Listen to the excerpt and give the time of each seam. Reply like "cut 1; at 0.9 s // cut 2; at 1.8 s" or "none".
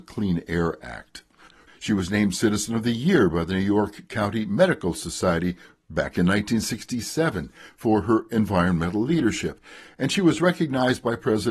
cut 1; at 1.7 s